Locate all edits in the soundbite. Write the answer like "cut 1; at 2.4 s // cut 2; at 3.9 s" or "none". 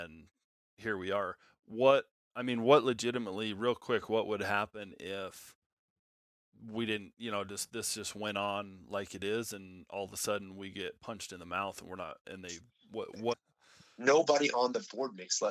cut 1; at 12.2 s // cut 2; at 13.3 s

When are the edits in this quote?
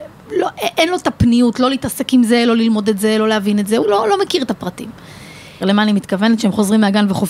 cut 1; at 3.8 s // cut 2; at 5.6 s

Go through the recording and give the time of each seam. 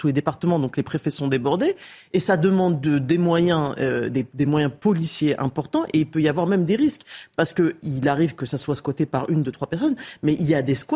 none

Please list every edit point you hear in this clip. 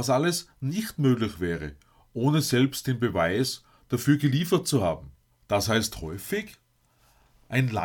cut 1; at 5.3 s

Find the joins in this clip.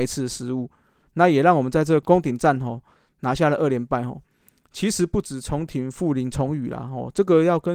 none

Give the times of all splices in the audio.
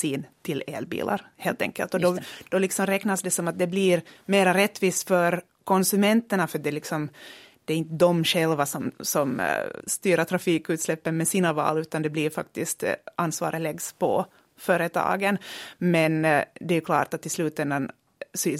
cut 1; at 9.8 s

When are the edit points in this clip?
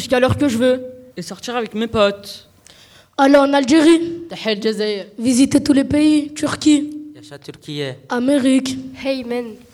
cut 1; at 1.1 s

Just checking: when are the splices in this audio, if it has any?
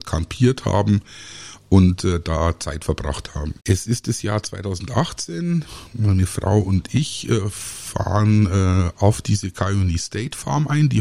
cut 1; at 3.6 s

